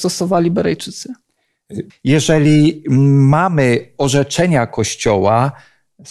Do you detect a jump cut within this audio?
yes; 1 cut; at 1.9 s

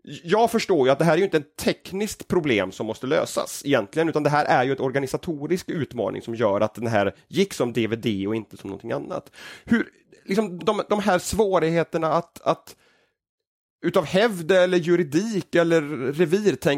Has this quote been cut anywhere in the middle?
yes; 1 cut; at 10.6 s

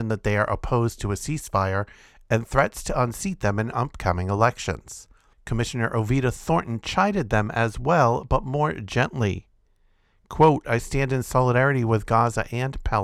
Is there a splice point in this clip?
yes; 1 cut; at 5.3 s

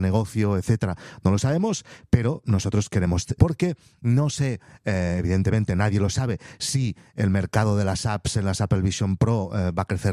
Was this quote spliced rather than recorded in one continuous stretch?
yes; 1 cut; at 3.4 s

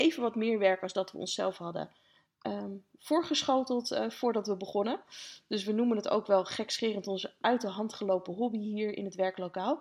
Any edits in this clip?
no; 0 cuts

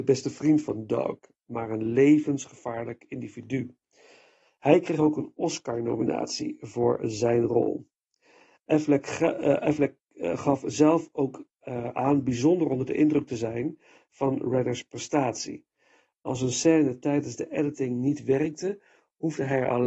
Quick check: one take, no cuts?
yes; 0 cuts

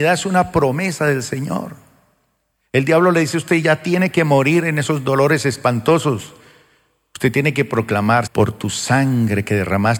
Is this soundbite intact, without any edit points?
no; 1 cut; at 8.3 s

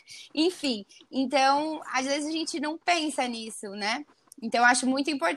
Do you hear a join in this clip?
no; 0 cuts

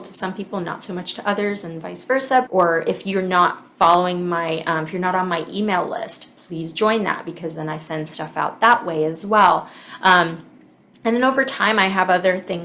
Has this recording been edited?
yes; 1 cut; at 2.5 s

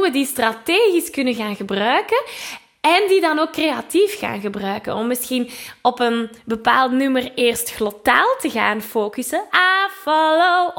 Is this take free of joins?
no; 1 cut; at 9.5 s

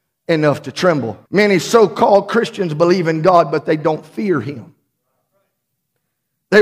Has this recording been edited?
yes; 1 cut; at 1.3 s

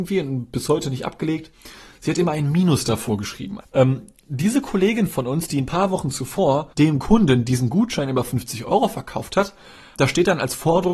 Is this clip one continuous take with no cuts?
no; 3 cuts; at 3.6 s, 6.7 s, 10.0 s

